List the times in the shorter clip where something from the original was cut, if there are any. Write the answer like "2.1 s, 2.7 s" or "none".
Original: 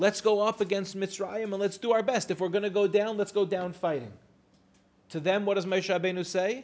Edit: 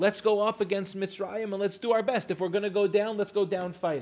none